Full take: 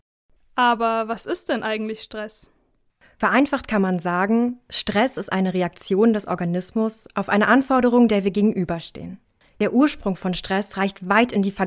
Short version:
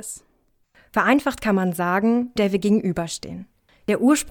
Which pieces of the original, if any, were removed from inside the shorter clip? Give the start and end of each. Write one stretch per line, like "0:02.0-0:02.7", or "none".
0:04.6-0:08.1